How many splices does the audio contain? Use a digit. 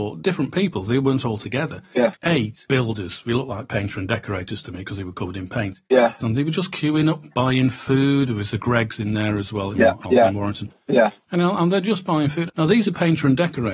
3